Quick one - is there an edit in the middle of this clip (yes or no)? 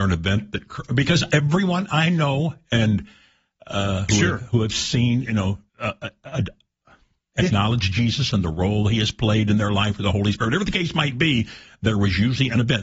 yes